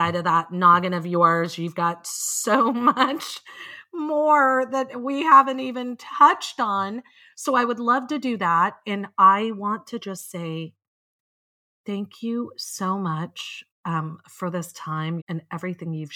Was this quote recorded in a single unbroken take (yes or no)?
no